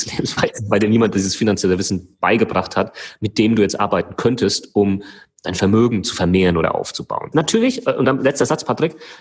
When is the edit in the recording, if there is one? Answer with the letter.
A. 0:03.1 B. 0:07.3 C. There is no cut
B